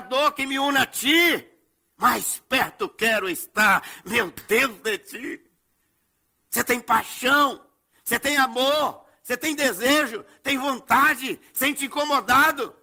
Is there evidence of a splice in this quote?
no; 0 cuts

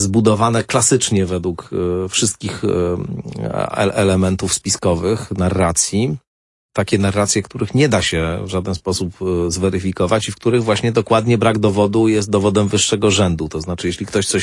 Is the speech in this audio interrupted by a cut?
no; 0 cuts

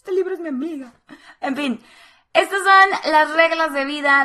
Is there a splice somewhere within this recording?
no; 0 cuts

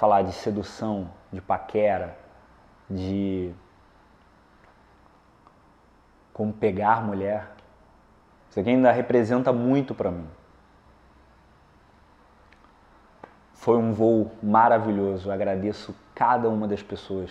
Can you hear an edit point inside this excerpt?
yes; 1 cut; at 8.3 s

